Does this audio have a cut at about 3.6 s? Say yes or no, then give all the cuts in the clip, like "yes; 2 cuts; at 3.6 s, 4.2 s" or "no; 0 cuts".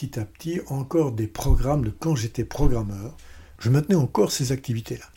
yes; 1 cut; at 3.6 s